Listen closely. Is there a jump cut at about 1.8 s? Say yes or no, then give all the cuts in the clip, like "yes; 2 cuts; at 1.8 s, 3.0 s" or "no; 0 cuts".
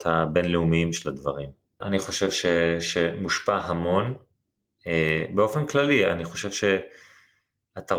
yes; 1 cut; at 1.8 s